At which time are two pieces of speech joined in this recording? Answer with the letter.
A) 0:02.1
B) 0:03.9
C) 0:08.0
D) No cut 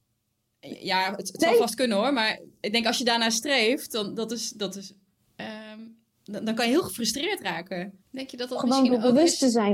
C